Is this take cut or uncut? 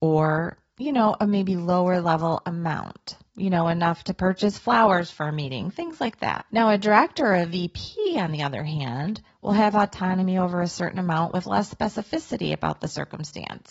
uncut